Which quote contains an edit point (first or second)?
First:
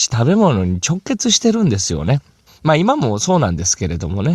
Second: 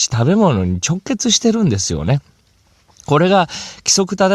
first